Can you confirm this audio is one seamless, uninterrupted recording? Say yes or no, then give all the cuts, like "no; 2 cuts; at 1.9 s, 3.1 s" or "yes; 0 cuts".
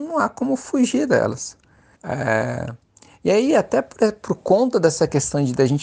no; 1 cut; at 1.9 s